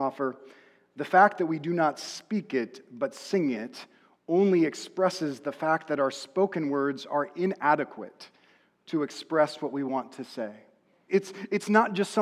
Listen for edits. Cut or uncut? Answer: cut